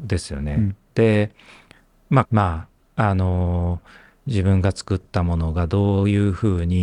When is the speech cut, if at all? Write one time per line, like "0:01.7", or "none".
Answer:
0:02.2